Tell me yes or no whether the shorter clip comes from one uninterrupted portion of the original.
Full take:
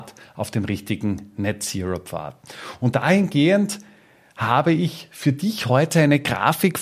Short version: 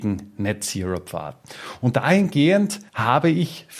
no